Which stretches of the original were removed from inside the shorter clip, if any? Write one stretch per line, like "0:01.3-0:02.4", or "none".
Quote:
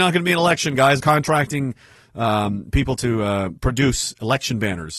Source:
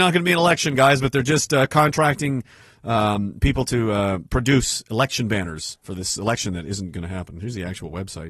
0:01.0-0:01.7